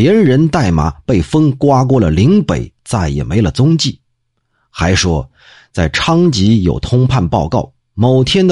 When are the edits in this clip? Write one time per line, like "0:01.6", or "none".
none

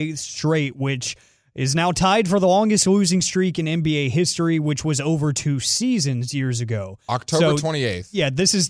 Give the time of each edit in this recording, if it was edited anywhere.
none

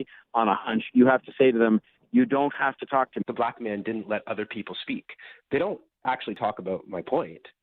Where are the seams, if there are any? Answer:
0:03.2

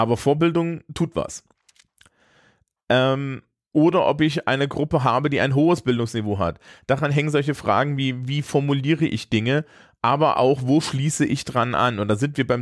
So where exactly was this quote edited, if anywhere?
none

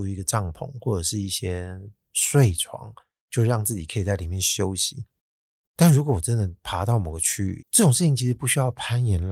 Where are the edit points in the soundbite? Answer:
0:05.6
0:07.6

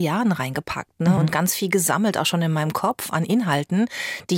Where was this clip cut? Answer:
none

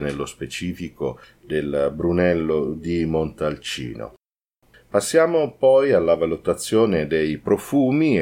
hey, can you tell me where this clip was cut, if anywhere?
0:04.7

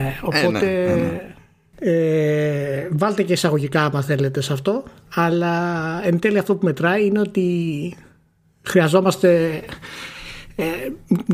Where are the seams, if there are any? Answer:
0:01.7

